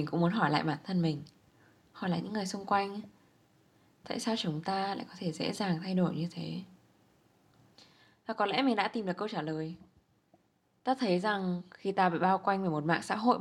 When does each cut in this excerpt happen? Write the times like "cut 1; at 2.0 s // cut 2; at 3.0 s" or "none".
none